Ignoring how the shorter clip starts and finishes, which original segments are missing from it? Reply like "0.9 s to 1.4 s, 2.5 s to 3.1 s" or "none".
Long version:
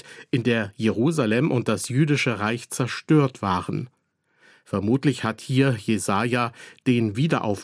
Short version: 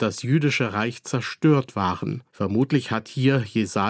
3.9 s to 4.6 s